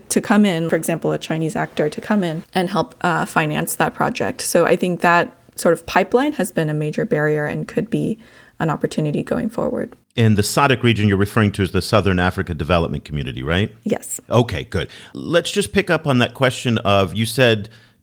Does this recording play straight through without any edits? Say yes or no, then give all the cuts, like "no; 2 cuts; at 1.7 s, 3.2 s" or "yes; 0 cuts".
yes; 0 cuts